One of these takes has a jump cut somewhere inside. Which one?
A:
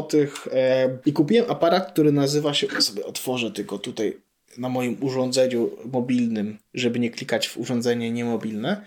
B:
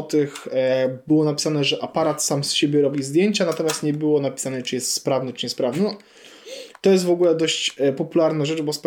A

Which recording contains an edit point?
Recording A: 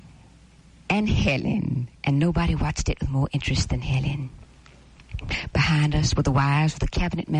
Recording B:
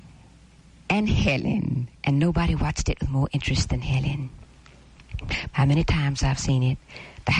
B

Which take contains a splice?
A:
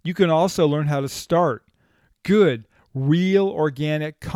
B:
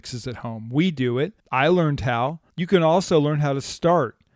B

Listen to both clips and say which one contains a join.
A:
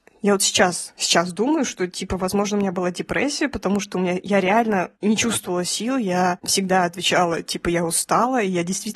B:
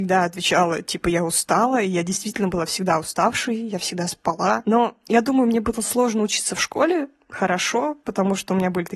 B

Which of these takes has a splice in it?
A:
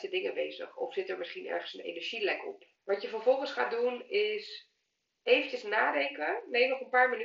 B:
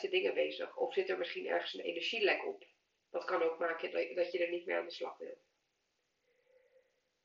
A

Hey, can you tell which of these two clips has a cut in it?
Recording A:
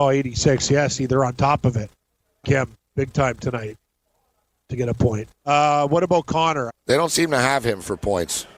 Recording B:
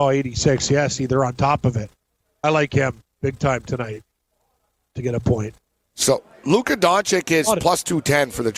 A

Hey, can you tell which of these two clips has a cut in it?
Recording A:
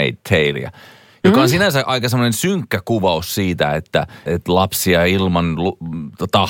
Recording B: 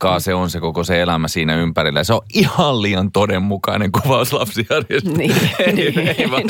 A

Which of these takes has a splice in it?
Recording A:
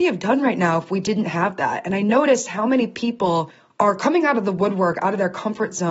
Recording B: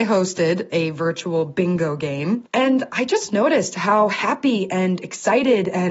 B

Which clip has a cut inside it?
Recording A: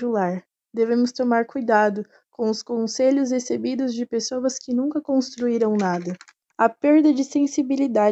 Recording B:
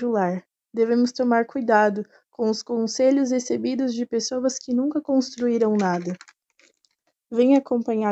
A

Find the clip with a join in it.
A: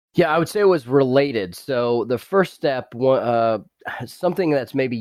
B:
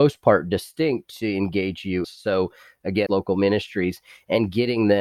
B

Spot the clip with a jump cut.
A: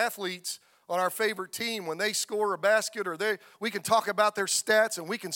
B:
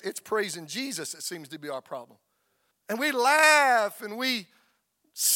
B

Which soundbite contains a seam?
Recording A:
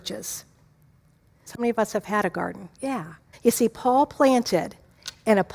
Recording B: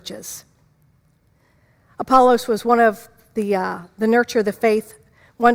A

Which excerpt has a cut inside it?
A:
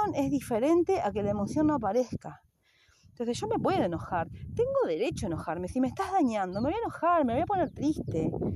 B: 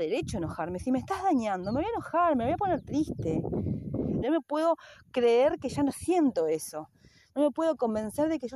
B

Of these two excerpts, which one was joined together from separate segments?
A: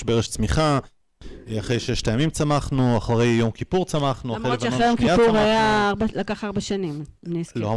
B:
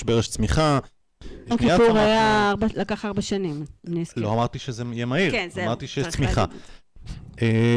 B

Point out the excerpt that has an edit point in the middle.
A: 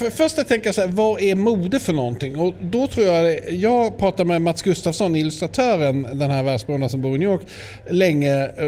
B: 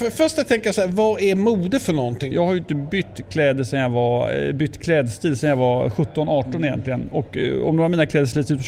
B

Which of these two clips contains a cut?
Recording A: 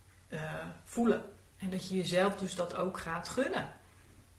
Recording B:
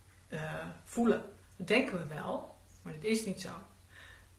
B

